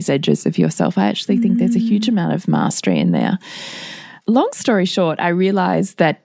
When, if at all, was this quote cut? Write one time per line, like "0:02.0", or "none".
0:04.2